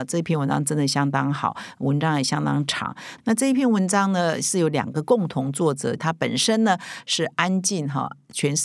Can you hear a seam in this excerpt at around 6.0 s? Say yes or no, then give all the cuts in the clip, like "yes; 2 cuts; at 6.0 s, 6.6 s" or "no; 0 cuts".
yes; 1 cut; at 6.0 s